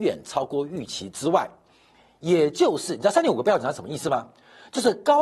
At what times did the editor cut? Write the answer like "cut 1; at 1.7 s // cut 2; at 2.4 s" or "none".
none